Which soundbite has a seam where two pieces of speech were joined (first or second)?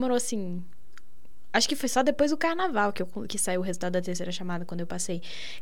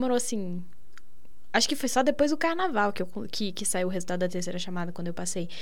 first